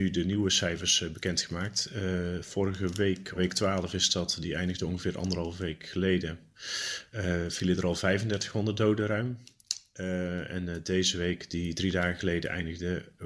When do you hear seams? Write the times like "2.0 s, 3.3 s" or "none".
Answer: 3.4 s